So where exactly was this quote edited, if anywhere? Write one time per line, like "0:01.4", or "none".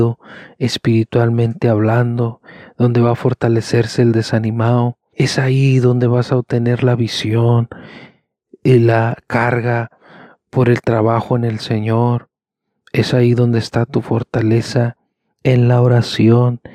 0:05.1